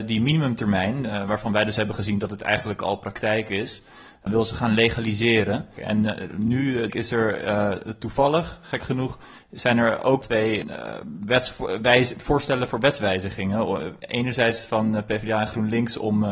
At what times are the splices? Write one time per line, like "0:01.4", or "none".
0:05.8
0:06.9